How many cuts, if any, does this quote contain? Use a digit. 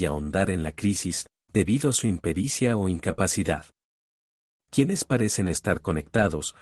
0